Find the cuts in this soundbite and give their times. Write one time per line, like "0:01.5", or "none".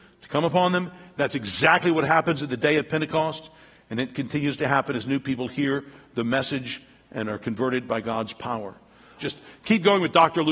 0:09.2